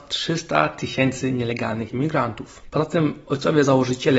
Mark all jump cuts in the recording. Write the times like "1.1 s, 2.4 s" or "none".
2.7 s

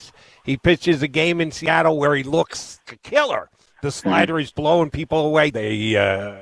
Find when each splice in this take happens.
2.9 s, 4.5 s, 5.5 s

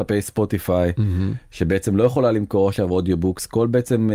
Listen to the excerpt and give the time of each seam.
none

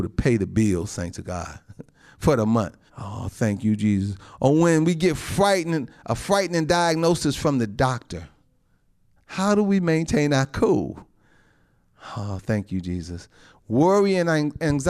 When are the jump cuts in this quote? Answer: 2.9 s, 9.2 s

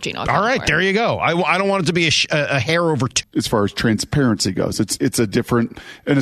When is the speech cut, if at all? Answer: 3.2 s

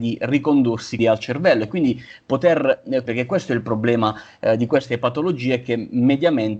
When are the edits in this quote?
1.0 s, 3.1 s

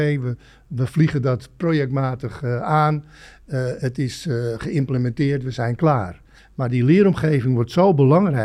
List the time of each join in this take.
6.4 s

